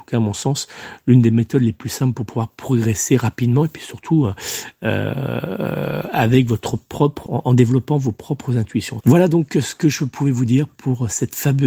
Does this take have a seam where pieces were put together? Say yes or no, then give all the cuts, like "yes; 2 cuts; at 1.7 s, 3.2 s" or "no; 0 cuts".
yes; 2 cuts; at 7.3 s, 9.0 s